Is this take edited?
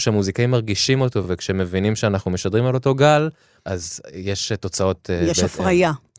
no; 0 cuts

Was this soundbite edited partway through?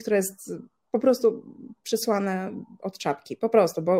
no; 0 cuts

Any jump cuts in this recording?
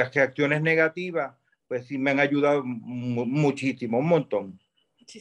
no; 0 cuts

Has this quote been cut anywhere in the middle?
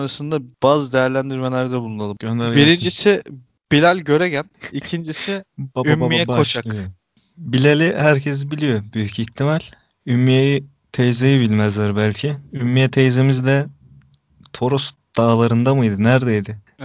no; 0 cuts

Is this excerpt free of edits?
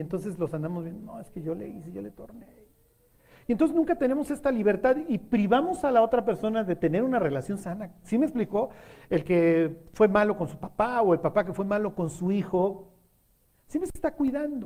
yes; 0 cuts

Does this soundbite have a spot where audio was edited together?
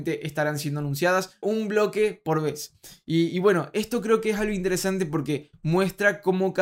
yes; 1 cut; at 1.4 s

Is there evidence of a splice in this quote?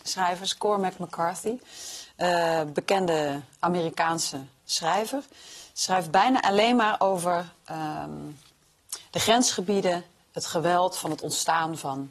no; 0 cuts

